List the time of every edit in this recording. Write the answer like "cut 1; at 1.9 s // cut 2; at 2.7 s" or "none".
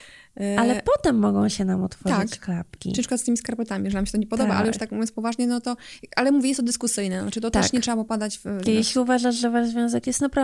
cut 1; at 8.7 s